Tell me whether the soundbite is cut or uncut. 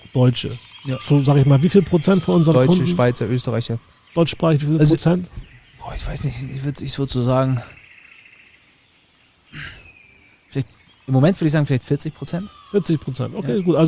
uncut